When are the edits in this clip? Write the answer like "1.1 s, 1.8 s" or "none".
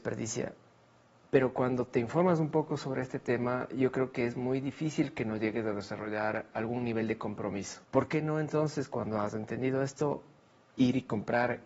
1.3 s, 7.8 s